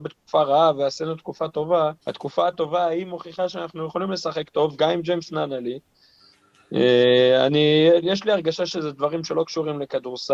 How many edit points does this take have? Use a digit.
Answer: 1